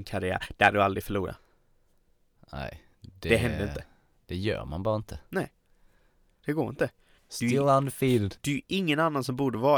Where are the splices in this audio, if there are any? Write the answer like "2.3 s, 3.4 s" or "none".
7.2 s, 8.4 s